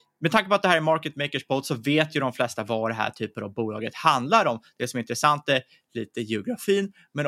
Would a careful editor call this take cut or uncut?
uncut